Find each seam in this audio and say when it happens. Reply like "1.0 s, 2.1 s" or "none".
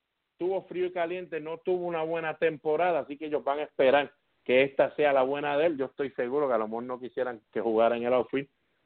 5.8 s